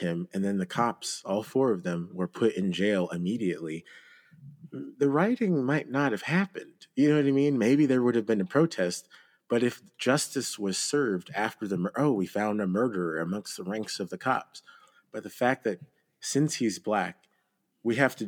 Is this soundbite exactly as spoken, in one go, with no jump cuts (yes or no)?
yes